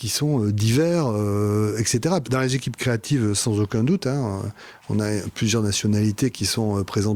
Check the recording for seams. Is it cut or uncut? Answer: cut